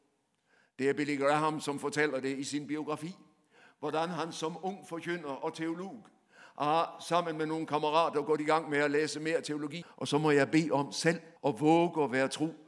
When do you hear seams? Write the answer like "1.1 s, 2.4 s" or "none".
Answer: 9.8 s, 11.4 s